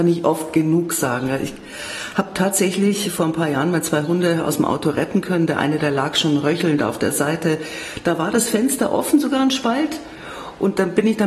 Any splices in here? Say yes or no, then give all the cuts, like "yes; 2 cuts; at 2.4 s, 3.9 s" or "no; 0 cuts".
no; 0 cuts